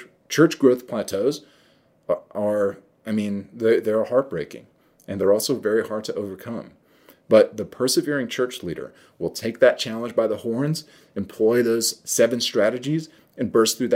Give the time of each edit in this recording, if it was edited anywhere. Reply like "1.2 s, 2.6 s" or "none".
none